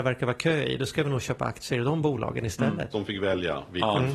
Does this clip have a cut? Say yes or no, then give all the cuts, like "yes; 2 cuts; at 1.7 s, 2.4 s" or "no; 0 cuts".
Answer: yes; 1 cut; at 2.9 s